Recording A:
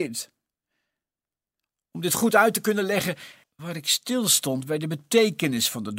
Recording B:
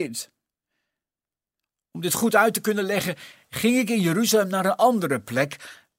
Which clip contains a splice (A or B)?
A